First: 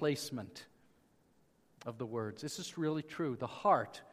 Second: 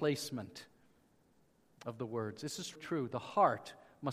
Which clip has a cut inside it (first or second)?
second